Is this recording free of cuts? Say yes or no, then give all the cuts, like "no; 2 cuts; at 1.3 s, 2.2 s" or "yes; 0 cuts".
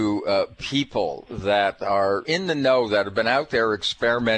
no; 1 cut; at 2.2 s